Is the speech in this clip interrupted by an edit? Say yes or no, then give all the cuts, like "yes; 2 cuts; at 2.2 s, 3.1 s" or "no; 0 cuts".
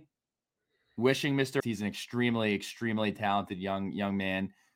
yes; 1 cut; at 1.6 s